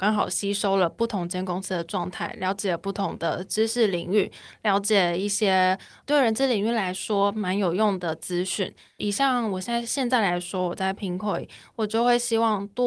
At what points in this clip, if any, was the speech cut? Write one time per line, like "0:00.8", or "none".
none